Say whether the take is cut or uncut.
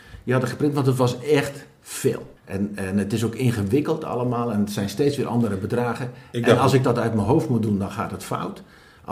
cut